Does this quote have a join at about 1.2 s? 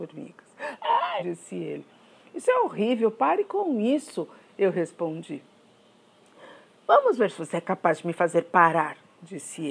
yes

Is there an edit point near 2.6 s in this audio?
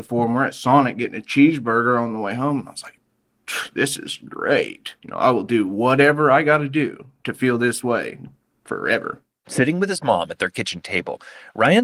no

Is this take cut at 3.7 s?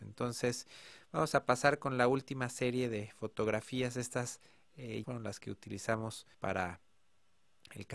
no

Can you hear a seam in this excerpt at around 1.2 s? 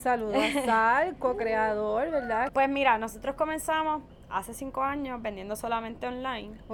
no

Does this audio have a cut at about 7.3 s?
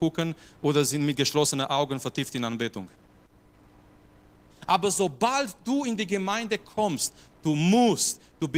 no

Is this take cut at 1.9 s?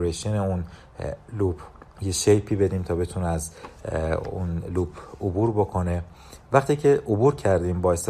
yes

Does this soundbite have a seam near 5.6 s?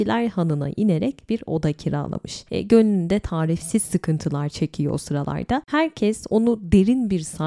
no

